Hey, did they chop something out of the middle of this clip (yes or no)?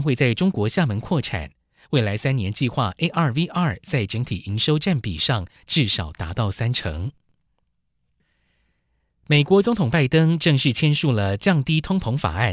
no